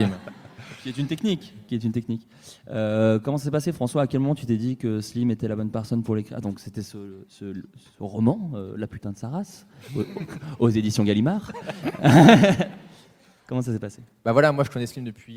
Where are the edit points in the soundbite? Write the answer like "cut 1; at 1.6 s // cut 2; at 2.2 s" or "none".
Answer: none